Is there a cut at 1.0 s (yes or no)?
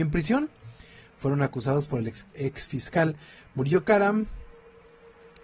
no